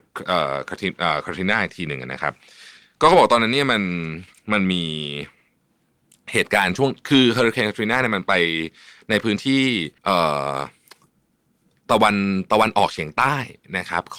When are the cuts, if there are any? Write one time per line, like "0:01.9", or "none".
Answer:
0:10.0